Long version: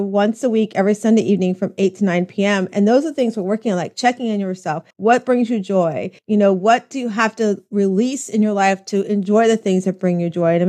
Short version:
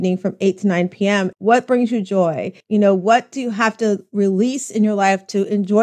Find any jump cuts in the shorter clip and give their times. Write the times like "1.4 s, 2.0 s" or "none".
1.3 s